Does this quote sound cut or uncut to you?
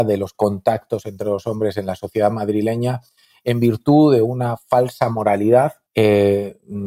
cut